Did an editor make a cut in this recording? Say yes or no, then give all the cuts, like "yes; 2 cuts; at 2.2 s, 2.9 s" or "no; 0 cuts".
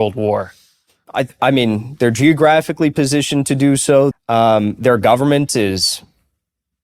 yes; 1 cut; at 4.1 s